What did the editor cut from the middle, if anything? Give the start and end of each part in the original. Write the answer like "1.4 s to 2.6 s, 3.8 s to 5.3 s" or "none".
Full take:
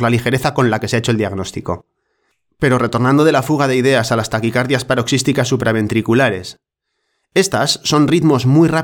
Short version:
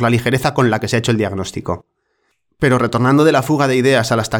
none